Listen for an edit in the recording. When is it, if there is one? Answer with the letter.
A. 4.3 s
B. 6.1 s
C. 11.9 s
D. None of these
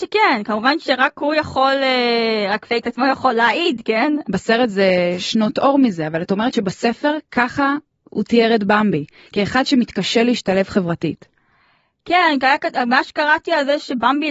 A